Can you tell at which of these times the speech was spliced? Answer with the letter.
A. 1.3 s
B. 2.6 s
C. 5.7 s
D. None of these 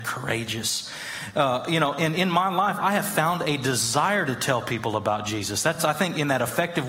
D